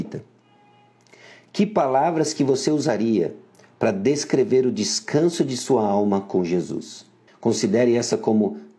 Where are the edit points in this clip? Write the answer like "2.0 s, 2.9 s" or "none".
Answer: 7.3 s